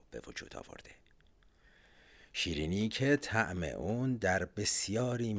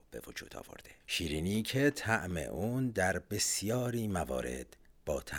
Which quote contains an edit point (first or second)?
second